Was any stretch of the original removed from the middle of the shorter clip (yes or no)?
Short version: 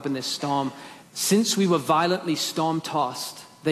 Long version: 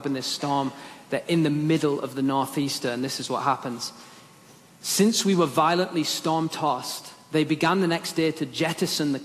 yes